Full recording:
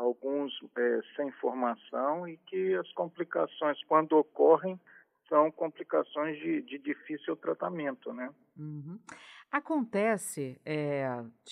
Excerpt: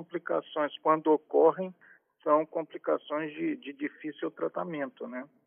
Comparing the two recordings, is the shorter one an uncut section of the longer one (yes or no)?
yes